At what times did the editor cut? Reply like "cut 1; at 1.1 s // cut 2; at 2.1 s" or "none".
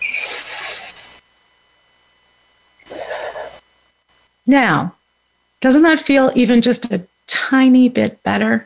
none